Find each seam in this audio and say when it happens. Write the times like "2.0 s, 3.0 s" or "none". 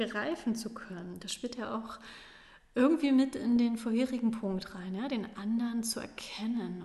none